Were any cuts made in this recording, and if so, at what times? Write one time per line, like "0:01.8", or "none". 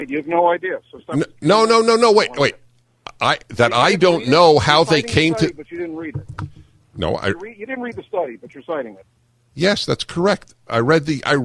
none